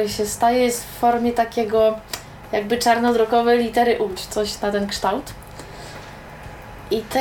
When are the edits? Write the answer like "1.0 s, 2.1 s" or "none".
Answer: 4.2 s